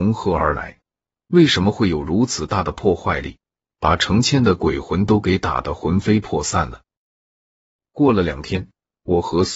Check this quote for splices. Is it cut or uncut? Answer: cut